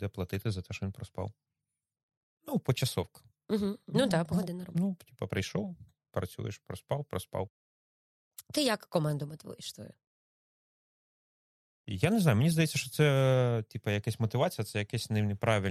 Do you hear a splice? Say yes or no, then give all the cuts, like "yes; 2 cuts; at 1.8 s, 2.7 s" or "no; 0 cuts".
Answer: no; 0 cuts